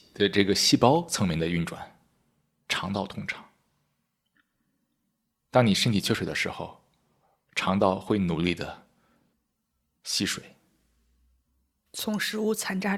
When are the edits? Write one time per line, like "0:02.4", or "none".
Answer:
0:02.7